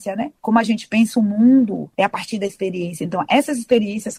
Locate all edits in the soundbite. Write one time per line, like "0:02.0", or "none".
none